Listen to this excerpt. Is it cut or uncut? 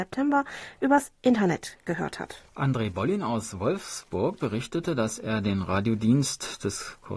cut